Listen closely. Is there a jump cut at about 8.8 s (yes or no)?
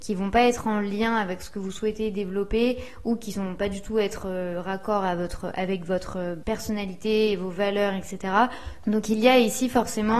yes